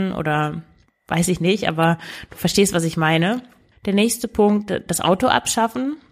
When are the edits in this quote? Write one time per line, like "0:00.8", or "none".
0:03.7